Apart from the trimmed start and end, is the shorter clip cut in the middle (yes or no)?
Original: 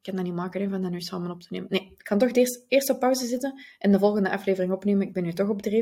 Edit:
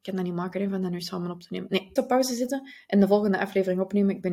yes